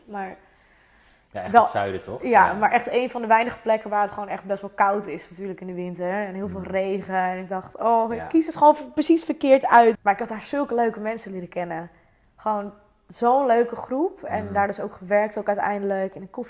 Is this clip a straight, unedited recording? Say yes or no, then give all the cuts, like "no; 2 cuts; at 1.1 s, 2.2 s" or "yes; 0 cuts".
no; 1 cut; at 9.9 s